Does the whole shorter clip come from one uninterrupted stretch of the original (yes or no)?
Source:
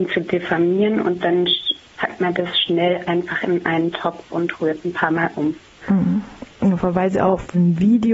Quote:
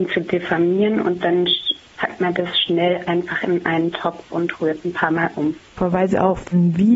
no